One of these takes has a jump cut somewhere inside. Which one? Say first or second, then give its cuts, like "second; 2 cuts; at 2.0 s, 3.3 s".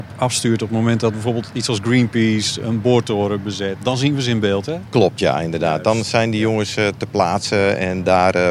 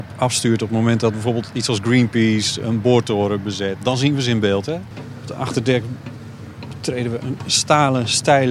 second; 1 cut; at 4.9 s